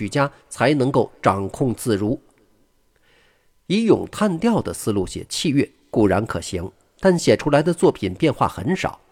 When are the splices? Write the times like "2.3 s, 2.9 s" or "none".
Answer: none